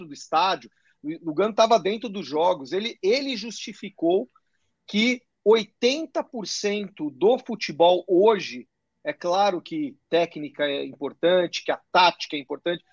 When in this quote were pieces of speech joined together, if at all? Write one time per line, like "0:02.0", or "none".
none